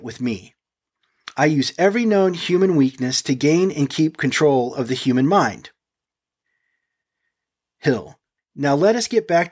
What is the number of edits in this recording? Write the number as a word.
one